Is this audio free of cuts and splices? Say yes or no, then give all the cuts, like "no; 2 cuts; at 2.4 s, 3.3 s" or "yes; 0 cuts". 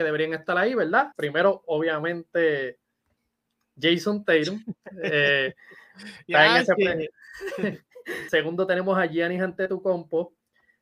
no; 2 cuts; at 1.1 s, 8.3 s